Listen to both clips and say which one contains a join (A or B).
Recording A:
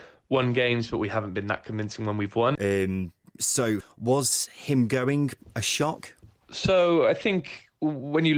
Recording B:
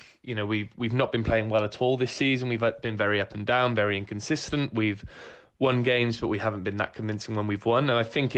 A